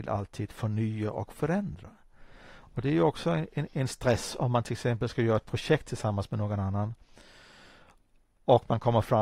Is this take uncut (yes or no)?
yes